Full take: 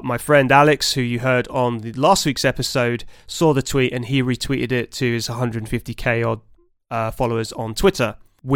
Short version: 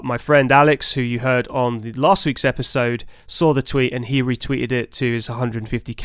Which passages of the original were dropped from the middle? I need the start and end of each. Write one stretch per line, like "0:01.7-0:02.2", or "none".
none